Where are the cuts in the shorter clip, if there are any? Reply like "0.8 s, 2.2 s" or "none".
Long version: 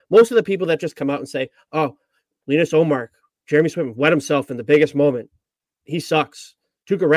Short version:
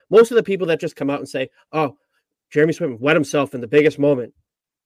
2.3 s